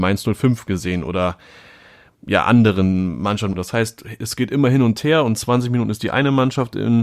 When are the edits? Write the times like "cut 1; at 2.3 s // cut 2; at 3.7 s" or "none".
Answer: cut 1; at 3.5 s